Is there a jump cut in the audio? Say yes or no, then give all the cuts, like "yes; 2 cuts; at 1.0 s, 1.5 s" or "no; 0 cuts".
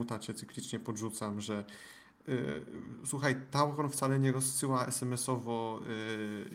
no; 0 cuts